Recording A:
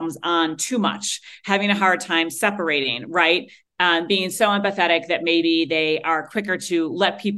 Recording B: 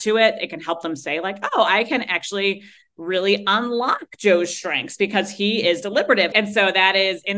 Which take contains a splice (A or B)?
B